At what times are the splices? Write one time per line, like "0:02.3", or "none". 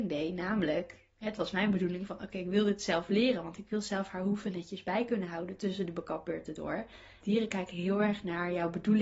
0:07.2